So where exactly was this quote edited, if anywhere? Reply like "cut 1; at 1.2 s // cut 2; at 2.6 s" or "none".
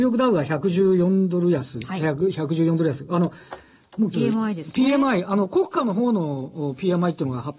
cut 1; at 4.1 s